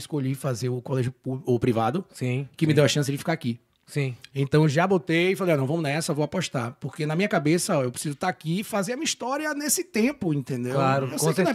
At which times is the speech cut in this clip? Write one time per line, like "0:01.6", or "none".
none